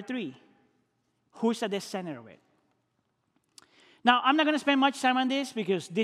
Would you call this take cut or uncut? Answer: uncut